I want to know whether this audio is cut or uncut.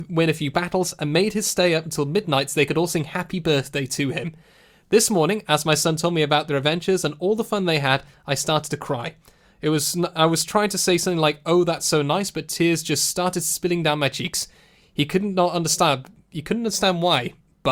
uncut